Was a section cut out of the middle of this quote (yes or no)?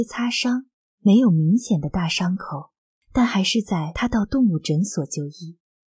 no